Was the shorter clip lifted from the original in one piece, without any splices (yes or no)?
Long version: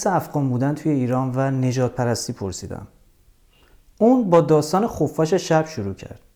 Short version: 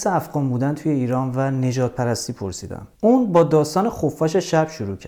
no